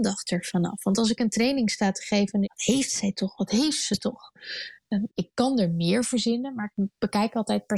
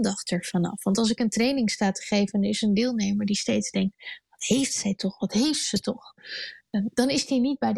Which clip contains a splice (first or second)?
first